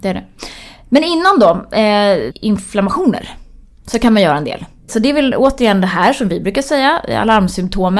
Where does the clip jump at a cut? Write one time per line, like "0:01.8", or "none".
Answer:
0:02.3
0:04.9